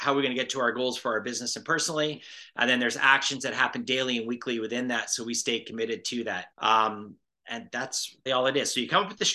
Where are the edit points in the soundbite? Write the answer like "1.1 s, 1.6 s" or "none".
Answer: 6.5 s, 8.3 s